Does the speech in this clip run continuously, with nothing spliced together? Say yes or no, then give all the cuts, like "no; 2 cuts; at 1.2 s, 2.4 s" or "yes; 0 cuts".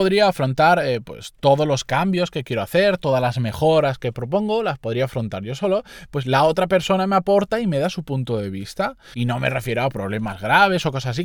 no; 2 cuts; at 6.1 s, 9.1 s